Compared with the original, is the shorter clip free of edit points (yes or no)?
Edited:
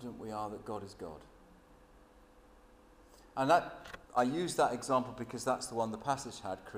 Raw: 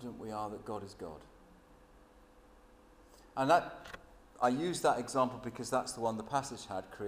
no